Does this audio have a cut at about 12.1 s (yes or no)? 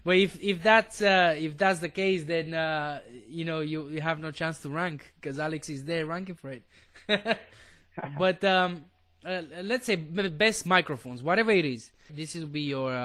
yes